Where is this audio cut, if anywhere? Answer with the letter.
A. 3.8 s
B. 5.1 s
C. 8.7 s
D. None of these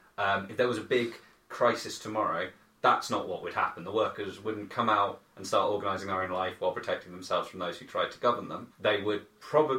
C